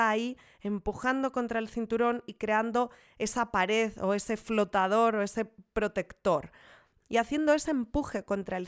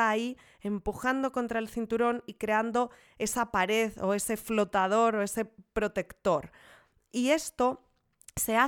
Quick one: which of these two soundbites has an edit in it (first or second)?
first